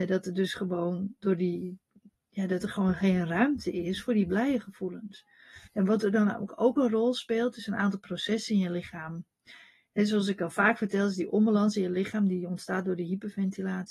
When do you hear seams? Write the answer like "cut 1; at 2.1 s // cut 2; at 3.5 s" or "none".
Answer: cut 1; at 5.7 s